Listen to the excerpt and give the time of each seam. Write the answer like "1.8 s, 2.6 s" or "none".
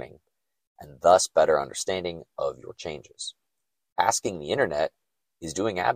none